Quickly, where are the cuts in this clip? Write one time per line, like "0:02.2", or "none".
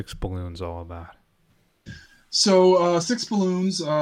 none